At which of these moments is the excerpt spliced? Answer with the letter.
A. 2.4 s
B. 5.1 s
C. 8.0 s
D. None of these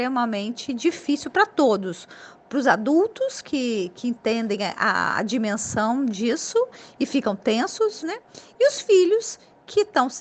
C